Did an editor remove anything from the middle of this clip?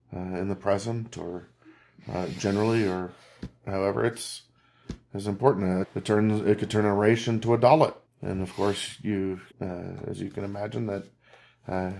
yes; 3 cuts; at 5.8 s, 8.1 s, 9.5 s

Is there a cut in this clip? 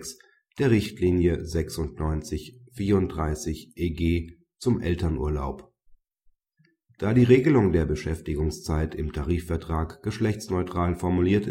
no; 0 cuts

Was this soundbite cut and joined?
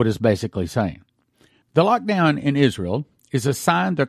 yes; 1 cut; at 1.6 s

